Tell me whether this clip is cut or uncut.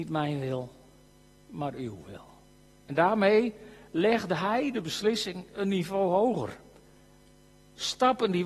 uncut